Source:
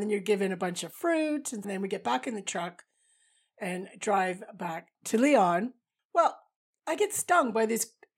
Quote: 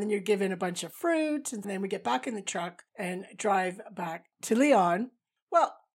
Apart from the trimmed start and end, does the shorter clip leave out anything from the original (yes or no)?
yes